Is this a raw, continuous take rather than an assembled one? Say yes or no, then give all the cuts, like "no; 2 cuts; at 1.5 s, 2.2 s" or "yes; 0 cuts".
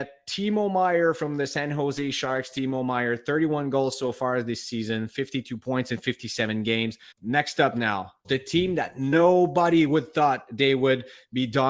no; 2 cuts; at 7.1 s, 8.2 s